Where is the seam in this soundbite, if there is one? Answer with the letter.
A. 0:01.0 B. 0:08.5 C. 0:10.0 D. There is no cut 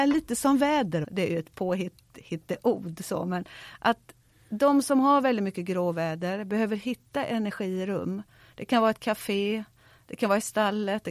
A